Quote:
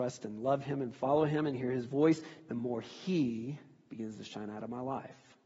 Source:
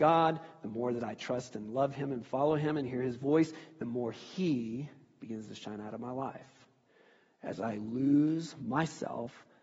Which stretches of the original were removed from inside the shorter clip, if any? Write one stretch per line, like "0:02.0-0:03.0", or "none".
none